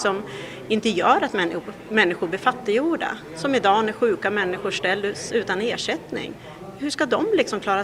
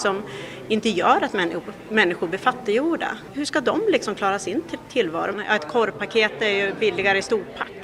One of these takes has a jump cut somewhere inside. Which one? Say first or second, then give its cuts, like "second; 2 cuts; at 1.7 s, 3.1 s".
second; 2 cuts; at 3.3 s, 5.3 s